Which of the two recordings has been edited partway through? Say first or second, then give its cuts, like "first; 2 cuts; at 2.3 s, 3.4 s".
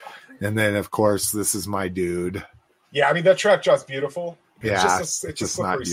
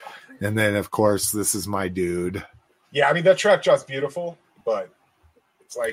first; 1 cut; at 4.6 s